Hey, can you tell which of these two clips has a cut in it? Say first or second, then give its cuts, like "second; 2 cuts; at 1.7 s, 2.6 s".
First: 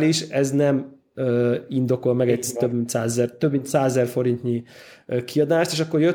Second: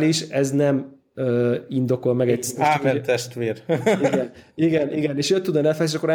second; 1 cut; at 2.6 s